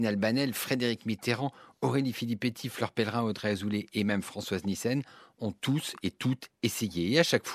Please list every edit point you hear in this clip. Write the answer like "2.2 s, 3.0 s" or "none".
none